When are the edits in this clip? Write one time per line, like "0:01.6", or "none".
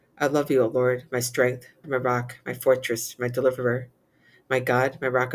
0:01.8